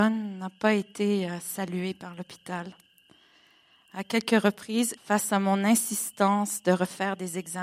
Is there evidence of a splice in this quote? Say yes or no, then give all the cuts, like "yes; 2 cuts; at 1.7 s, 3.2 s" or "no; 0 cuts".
yes; 1 cut; at 5.0 s